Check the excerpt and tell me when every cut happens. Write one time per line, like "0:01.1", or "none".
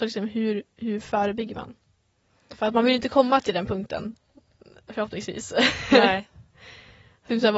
none